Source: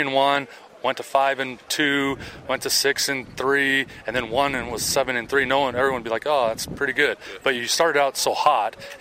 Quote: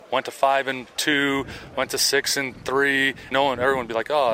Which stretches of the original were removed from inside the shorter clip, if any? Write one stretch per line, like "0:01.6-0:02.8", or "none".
0:04.0-0:05.5